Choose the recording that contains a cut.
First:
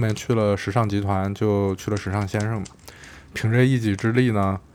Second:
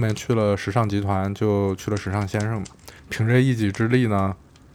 second; 1 cut; at 3.0 s

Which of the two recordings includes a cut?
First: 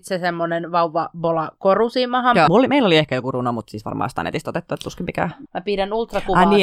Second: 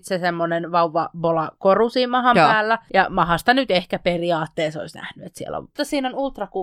first; 2 cuts; at 2.5 s, 5.5 s

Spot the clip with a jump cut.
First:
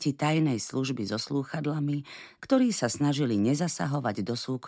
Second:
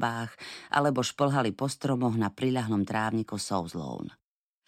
first; 1 cut; at 2.4 s

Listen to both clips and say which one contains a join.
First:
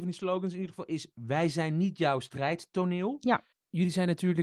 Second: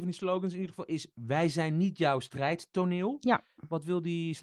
first; 1 cut; at 3.5 s

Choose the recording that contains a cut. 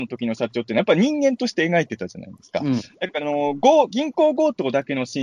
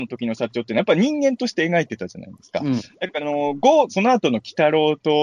second; 1 cut; at 3.9 s

